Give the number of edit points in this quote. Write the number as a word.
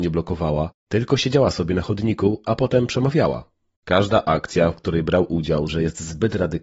two